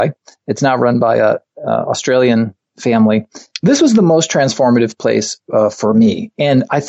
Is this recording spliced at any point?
yes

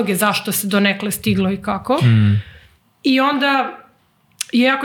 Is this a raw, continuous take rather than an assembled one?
yes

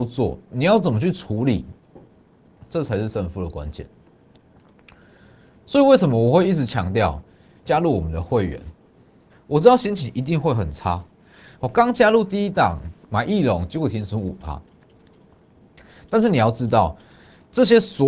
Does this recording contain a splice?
yes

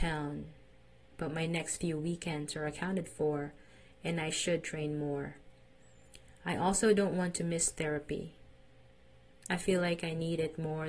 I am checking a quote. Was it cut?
no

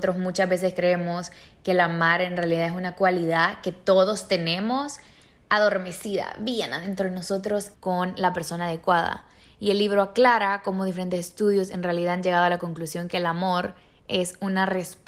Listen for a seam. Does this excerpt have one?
yes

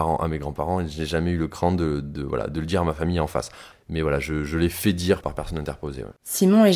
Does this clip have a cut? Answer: yes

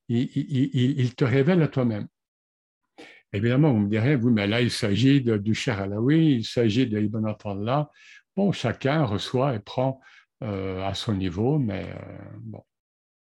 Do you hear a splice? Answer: no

